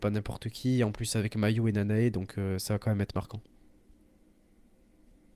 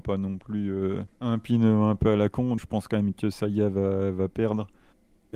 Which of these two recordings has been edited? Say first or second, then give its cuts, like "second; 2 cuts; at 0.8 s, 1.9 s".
second; 2 cuts; at 1.1 s, 2.6 s